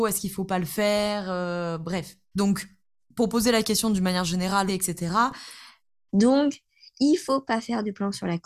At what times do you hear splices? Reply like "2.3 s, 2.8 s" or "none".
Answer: 2.3 s, 4.7 s, 6.1 s